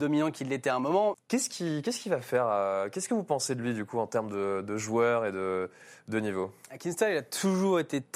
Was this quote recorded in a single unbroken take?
no; 1 cut; at 1.1 s

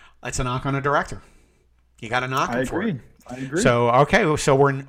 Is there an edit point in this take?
no; 0 cuts

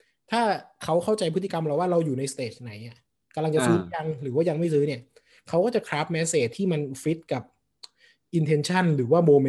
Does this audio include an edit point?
no; 0 cuts

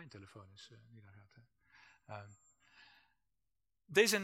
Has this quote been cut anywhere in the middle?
no; 0 cuts

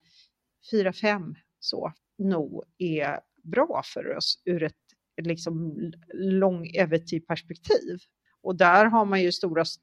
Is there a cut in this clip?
yes; 2 cuts; at 2.0 s, 8.3 s

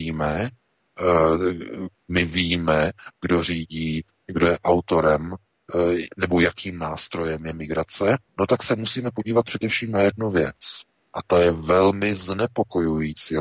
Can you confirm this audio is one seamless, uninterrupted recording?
no; 2 cuts; at 1.9 s, 8.3 s

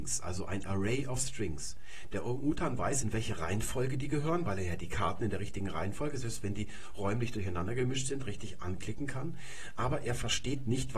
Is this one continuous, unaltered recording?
yes; 0 cuts

